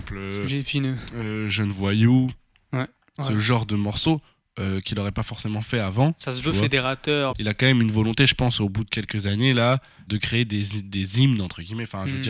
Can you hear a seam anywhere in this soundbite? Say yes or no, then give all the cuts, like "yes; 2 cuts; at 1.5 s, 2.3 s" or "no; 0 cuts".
yes; 3 cuts; at 3.2 s, 7.3 s, 10.1 s